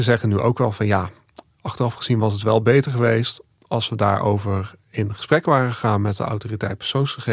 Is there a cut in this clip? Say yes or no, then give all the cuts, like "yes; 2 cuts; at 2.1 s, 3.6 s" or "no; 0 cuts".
no; 0 cuts